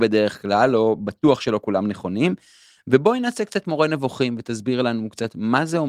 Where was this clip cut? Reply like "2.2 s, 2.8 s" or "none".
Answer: none